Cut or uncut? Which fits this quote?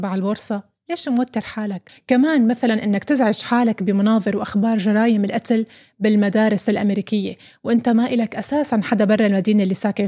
uncut